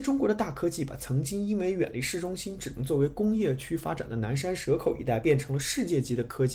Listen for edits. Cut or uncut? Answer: uncut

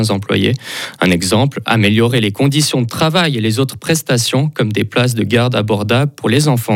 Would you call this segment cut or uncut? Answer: uncut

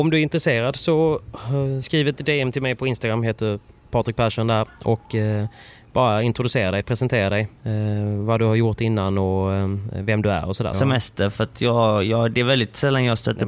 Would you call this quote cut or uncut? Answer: cut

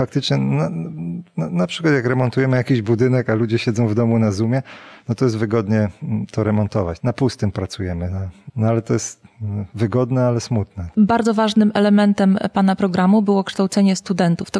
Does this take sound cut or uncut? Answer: uncut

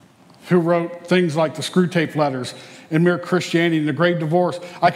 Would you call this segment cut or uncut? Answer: uncut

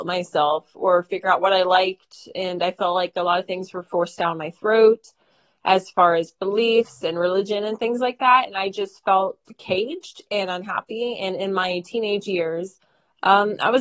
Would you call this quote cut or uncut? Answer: uncut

